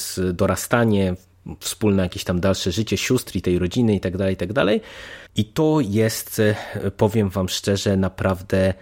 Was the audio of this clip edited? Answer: yes; 1 cut; at 5.3 s

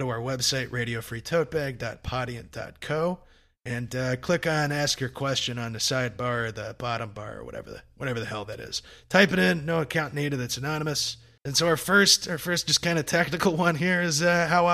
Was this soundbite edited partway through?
yes; 1 cut; at 11.4 s

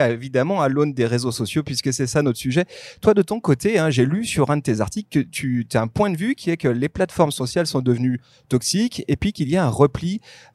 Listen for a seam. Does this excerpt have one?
no; 0 cuts

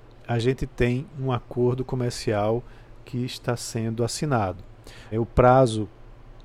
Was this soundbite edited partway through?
yes; 1 cut; at 5.1 s

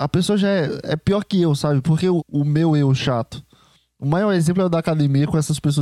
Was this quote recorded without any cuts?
no; 1 cut; at 2.2 s

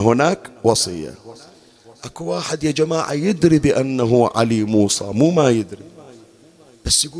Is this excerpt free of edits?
yes; 0 cuts

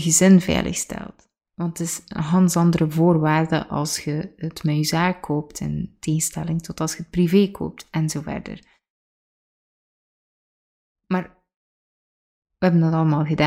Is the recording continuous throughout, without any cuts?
yes; 0 cuts

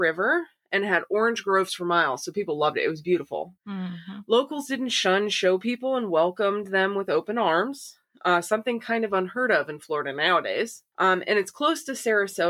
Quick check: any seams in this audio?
yes; 2 cuts; at 3.6 s, 10.9 s

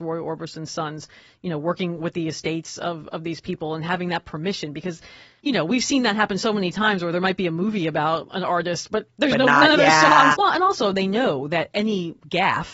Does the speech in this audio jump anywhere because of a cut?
yes; 1 cut; at 10.3 s

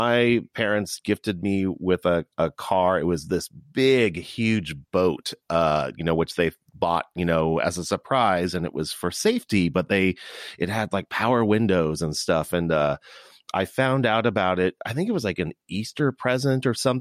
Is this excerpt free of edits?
yes; 0 cuts

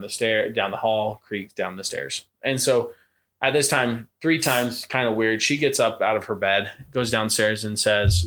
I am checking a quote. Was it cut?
no; 0 cuts

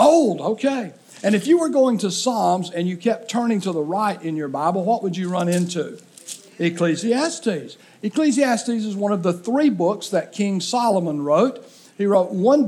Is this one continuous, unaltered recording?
yes; 0 cuts

